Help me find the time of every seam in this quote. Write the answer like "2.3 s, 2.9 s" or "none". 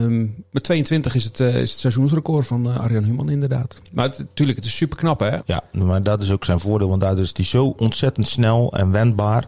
5.4 s